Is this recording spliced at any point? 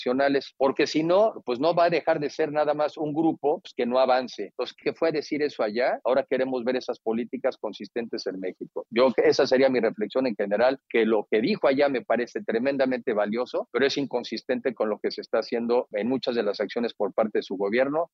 yes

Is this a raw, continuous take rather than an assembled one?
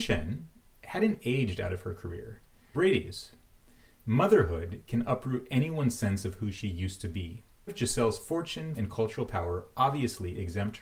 no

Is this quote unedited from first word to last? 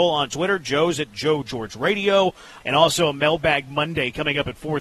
no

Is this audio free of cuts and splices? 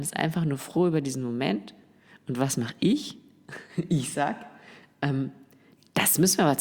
yes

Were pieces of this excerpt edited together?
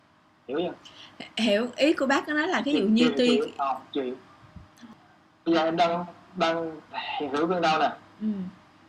no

